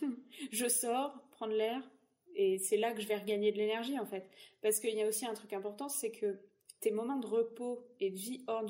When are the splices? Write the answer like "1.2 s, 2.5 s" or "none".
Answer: 6.8 s